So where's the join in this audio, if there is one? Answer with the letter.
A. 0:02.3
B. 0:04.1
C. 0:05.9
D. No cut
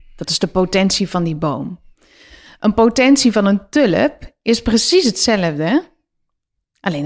D